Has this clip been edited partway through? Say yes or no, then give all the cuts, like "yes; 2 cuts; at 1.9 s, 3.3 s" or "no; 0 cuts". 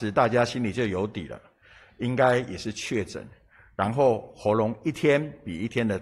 no; 0 cuts